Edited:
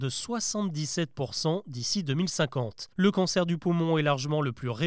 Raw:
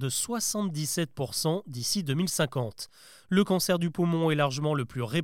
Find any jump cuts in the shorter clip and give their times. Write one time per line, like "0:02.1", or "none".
0:02.9